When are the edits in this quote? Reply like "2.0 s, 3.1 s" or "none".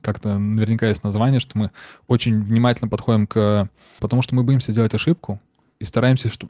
4.0 s